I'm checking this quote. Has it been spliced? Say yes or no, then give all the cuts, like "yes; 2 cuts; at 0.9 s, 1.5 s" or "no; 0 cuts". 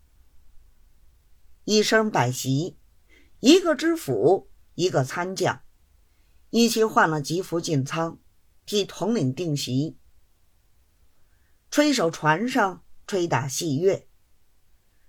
no; 0 cuts